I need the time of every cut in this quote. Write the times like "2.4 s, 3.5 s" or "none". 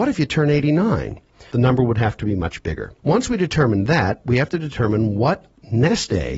1.5 s, 3.0 s

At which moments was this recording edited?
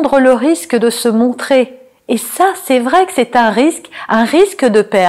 none

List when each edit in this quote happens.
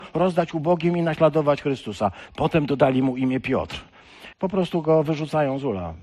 2.3 s, 4.3 s

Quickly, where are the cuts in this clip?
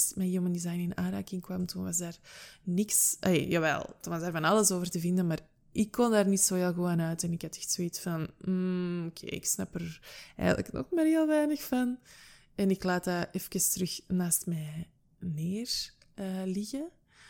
none

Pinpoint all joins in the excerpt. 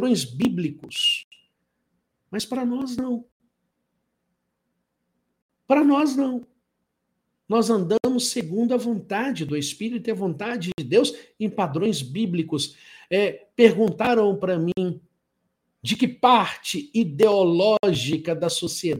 none

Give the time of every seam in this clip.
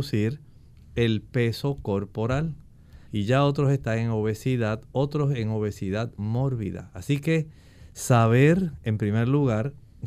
3.1 s

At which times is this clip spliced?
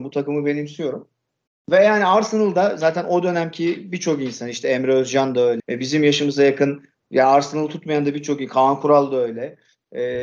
5.6 s

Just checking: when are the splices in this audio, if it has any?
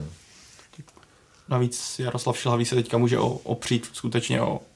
none

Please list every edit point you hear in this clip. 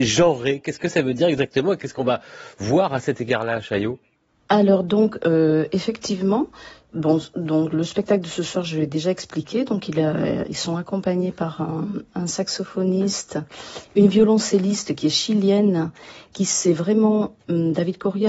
none

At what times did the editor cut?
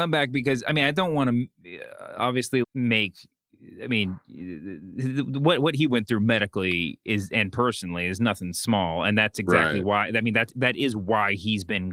2.6 s

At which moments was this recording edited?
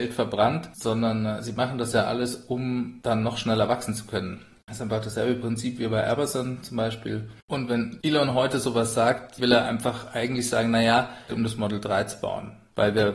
7.4 s, 9.4 s, 11.3 s

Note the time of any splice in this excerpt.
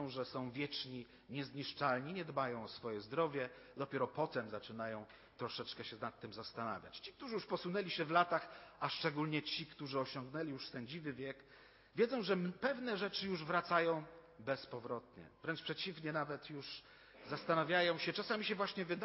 none

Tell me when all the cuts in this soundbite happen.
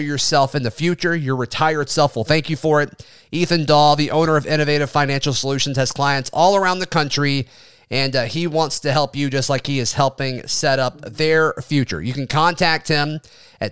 none

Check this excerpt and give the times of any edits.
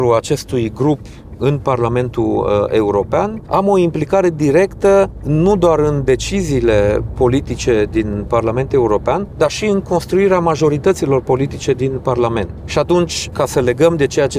none

